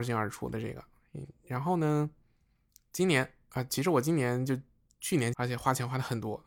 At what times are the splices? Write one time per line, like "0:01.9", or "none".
0:05.3